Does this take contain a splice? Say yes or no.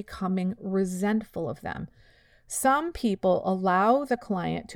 no